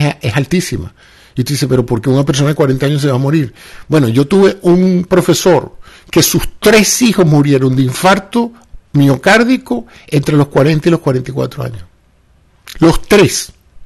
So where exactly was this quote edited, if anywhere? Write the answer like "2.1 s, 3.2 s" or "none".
none